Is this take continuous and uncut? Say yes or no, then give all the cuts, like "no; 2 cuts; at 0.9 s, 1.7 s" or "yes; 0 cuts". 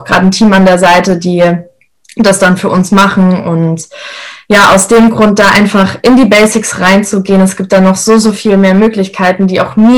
yes; 0 cuts